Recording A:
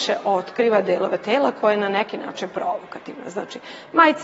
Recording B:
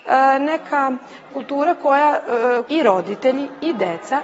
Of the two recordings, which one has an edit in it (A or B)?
B